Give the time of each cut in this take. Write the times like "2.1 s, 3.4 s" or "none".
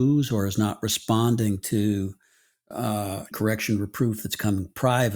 3.3 s